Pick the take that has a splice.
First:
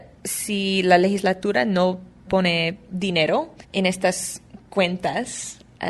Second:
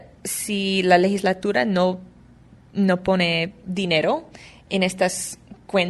first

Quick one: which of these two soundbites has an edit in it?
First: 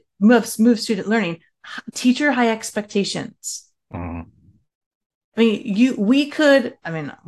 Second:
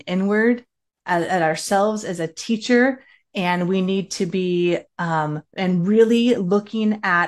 second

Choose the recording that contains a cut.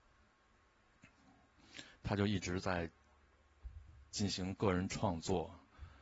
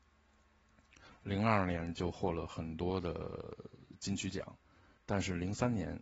second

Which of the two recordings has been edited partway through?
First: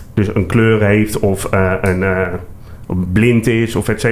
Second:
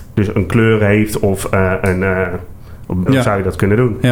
second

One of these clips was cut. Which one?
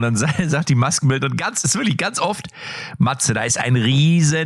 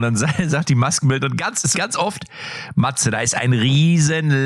second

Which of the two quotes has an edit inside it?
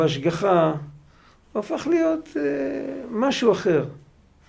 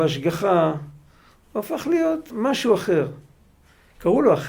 second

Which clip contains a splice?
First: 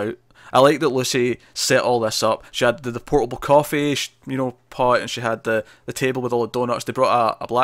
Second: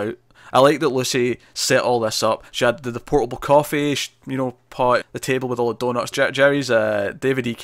second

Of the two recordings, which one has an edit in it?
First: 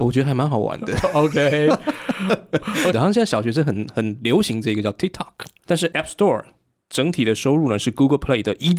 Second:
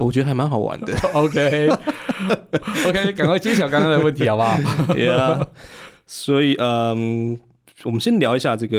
first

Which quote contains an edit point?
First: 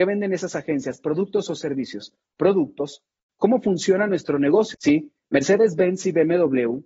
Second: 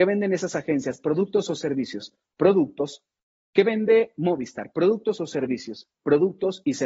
first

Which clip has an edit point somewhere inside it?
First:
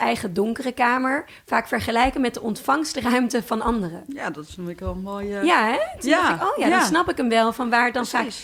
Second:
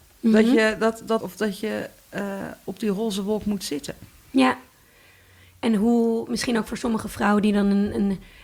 second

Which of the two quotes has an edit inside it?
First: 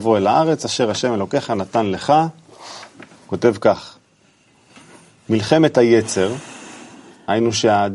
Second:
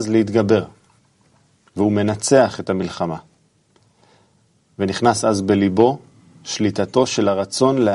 first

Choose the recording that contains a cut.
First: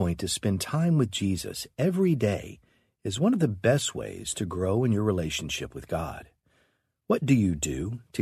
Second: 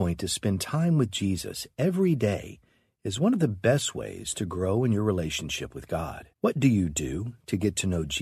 second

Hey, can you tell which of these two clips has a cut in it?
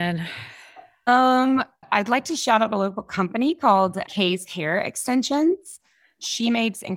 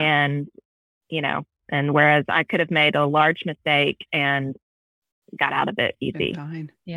first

